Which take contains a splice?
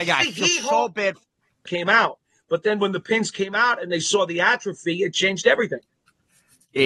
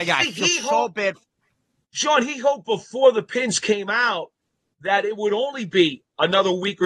first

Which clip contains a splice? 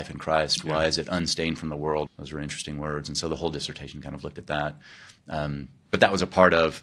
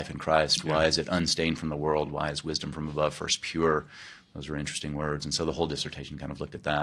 first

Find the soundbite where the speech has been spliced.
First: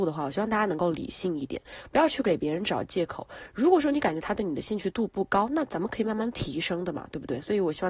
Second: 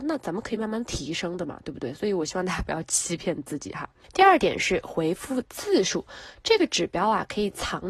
first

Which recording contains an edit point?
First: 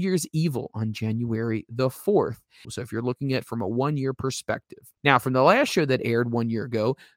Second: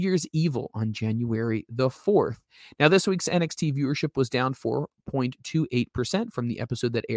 first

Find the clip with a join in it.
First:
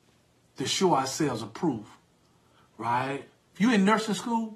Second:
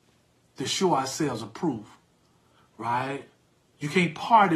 first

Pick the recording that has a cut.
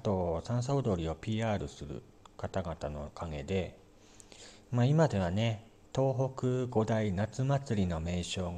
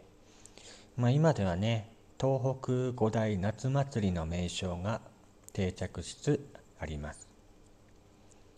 second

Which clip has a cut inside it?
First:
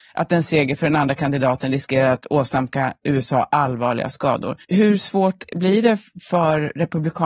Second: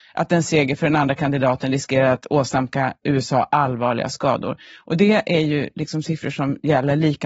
first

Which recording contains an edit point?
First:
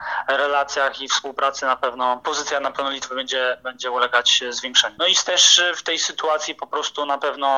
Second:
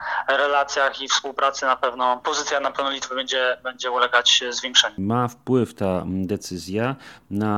first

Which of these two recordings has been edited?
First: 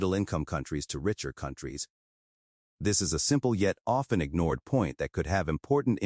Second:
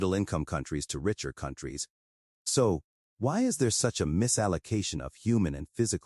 second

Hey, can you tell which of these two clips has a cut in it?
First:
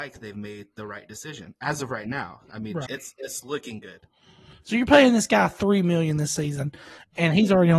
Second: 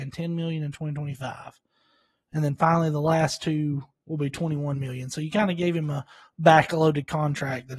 first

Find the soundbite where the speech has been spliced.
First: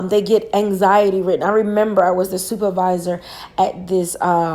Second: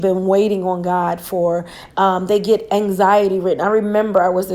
second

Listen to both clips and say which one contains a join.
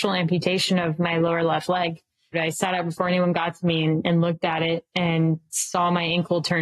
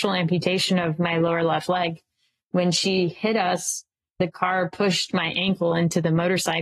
first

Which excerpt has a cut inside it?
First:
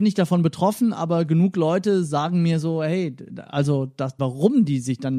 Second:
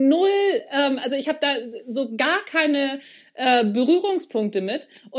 first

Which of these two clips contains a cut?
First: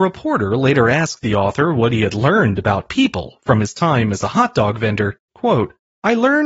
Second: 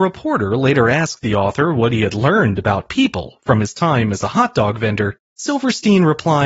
first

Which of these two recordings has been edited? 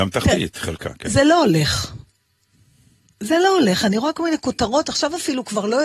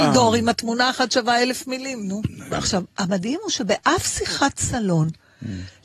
second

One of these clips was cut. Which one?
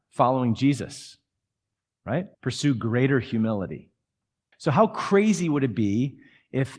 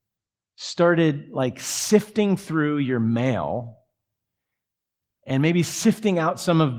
first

